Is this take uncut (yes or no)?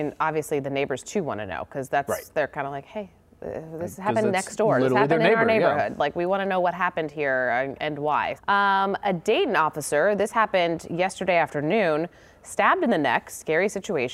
no